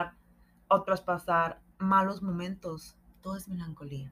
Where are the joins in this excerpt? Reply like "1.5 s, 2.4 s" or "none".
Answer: 1.7 s, 3.1 s